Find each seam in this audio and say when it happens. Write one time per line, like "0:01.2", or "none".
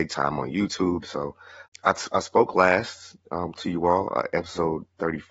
0:01.0